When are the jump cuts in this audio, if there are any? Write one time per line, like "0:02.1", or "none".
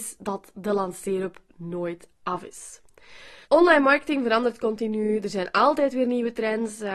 0:03.4